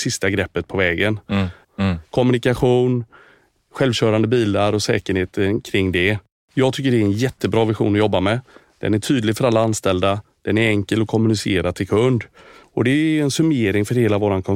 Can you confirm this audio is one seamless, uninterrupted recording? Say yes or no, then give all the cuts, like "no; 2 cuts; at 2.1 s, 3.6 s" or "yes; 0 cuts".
no; 2 cuts; at 1.6 s, 12.6 s